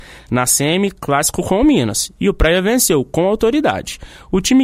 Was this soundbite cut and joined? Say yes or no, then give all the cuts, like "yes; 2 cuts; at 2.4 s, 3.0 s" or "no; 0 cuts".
no; 0 cuts